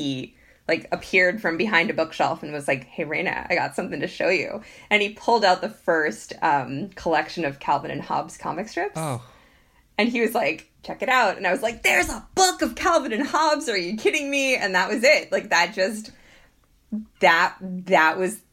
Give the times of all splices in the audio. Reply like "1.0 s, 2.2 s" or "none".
none